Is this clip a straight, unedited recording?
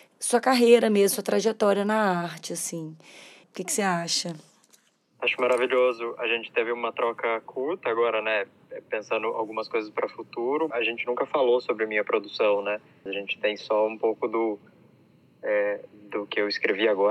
no; 3 cuts; at 3.4 s, 10.7 s, 13.1 s

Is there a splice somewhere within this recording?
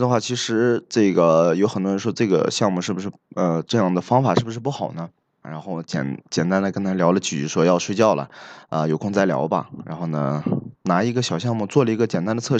yes; 1 cut; at 5.4 s

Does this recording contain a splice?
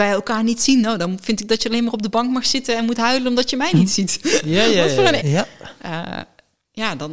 yes; 1 cut; at 5.2 s

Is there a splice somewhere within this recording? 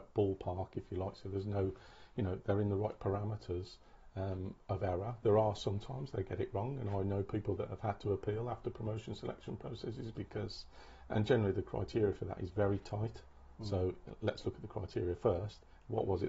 no; 0 cuts

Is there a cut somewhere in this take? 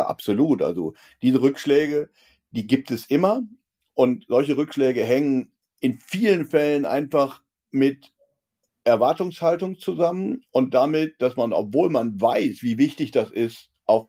no; 0 cuts

